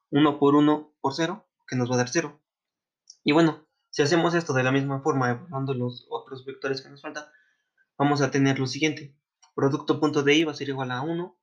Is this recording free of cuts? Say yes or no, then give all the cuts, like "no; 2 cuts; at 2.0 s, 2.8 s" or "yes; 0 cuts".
yes; 0 cuts